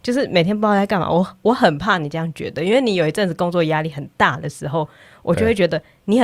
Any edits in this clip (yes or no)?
no